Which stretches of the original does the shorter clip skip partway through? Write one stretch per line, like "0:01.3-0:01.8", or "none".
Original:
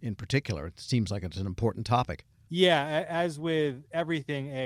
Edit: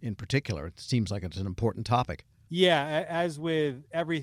none